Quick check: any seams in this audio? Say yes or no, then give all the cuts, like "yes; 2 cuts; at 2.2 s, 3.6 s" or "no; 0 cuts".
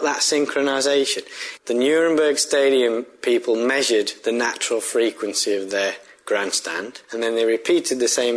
yes; 2 cuts; at 1.6 s, 7.0 s